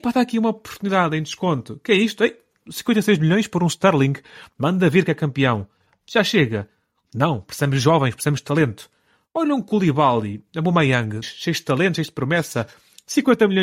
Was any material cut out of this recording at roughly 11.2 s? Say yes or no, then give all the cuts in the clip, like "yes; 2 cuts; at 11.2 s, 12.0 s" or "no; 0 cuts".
yes; 1 cut; at 11.2 s